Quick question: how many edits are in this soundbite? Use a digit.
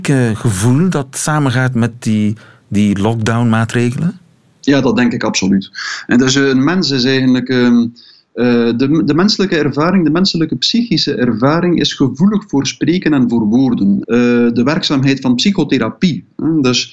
1